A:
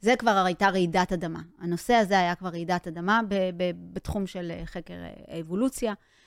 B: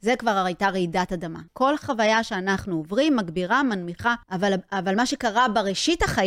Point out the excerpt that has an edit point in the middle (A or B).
B